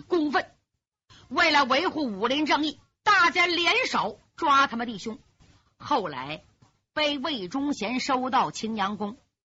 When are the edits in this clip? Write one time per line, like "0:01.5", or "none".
none